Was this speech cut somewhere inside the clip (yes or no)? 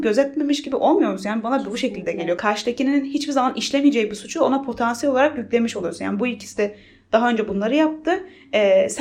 no